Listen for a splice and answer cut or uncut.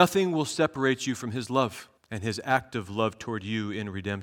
cut